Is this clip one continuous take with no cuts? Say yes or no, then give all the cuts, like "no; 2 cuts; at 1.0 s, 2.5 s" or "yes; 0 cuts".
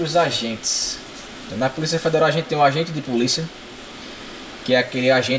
no; 1 cut; at 1.5 s